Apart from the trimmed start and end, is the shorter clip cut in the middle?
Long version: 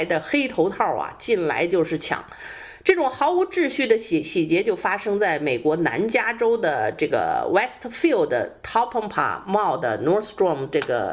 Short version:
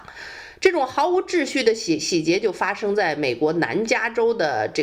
no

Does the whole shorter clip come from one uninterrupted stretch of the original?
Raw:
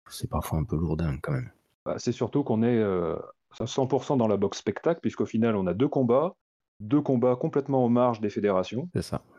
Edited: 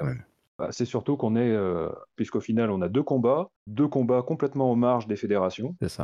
no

